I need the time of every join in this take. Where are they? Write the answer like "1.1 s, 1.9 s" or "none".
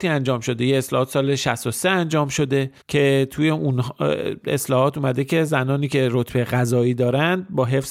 2.8 s